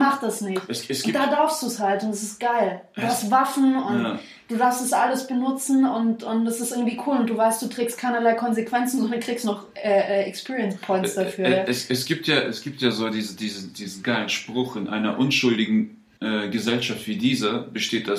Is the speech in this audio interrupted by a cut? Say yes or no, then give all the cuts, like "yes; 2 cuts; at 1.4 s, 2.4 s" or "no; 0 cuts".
no; 0 cuts